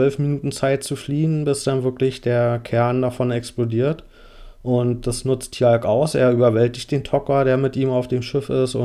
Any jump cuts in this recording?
no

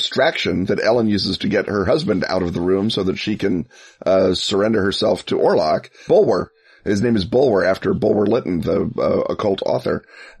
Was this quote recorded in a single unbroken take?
no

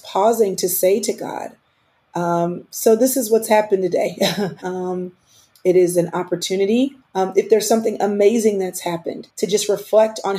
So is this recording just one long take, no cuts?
no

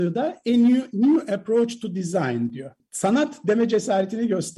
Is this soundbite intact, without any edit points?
no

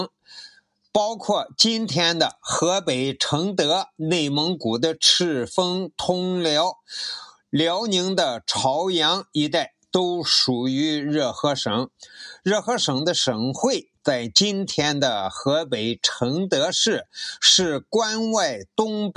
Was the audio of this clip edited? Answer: no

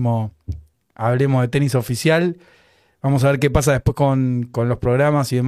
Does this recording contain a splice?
no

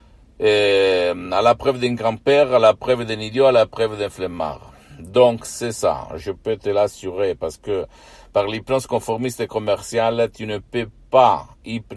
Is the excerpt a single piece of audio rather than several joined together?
no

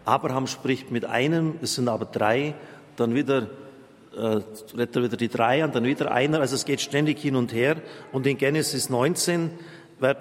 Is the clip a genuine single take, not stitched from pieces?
yes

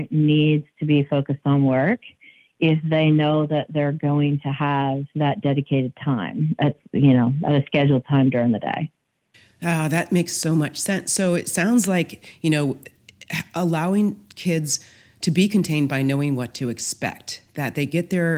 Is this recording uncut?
yes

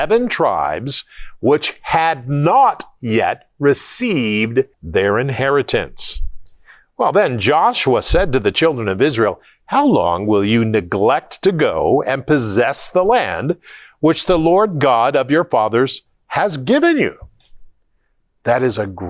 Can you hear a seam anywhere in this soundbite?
yes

